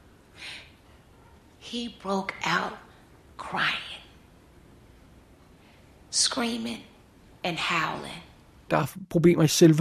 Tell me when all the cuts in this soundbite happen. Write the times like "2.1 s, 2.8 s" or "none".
8.7 s